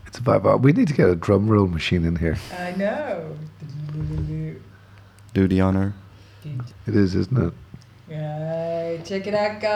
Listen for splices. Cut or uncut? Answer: cut